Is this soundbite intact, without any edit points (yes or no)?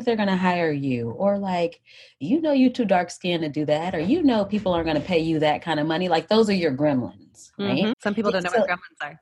no